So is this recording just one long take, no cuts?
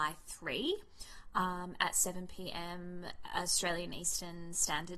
yes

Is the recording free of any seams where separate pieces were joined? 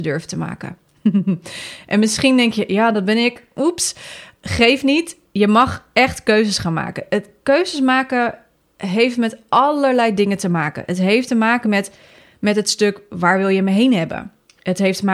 yes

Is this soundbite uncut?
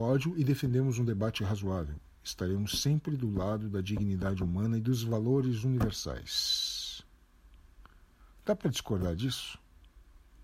yes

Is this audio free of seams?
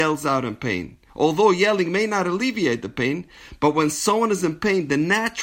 yes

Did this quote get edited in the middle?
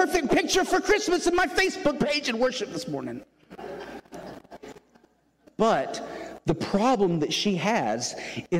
yes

